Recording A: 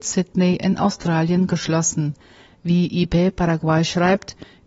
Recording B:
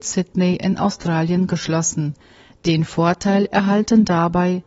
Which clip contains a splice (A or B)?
A